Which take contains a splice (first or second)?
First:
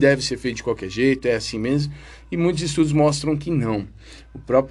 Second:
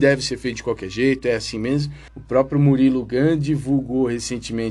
second